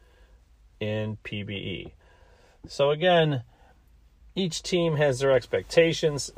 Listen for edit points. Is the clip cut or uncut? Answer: uncut